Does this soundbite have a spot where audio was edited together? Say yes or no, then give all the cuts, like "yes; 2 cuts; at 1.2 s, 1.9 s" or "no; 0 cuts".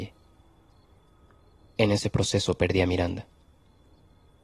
yes; 1 cut; at 1.6 s